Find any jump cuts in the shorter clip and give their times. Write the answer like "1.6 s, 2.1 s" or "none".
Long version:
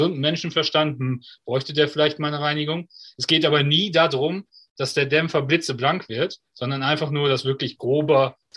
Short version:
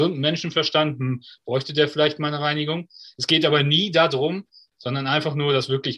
4.7 s